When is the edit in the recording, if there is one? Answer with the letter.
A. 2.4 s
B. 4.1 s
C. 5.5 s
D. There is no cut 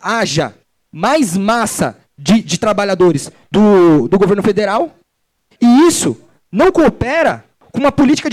D